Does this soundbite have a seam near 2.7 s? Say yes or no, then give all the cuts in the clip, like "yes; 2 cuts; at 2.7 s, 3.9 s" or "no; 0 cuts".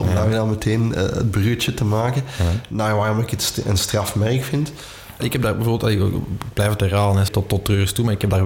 no; 2 cuts; at 5.2 s, 7.3 s